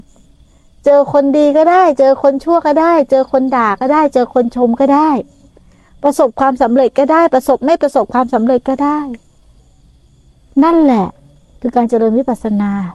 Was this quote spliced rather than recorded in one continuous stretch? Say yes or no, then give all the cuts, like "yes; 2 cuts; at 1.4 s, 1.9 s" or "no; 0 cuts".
no; 0 cuts